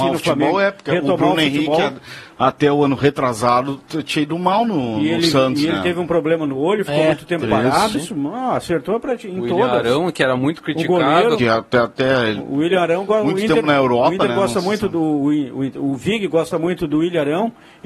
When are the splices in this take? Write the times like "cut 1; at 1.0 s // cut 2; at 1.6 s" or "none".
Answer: cut 1; at 7.9 s // cut 2; at 11.4 s